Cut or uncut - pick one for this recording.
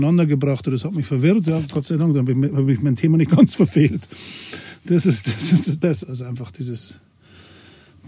cut